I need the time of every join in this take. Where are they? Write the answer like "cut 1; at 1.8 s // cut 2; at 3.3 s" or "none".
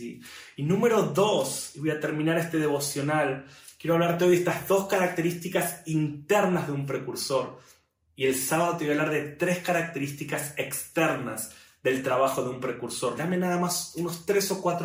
cut 1; at 13.1 s